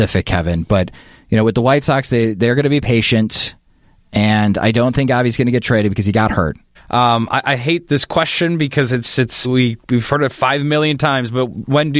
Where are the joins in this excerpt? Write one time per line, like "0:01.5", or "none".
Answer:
0:06.8
0:07.9
0:09.4